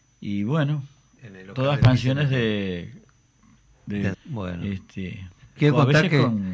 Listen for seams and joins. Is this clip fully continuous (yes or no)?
no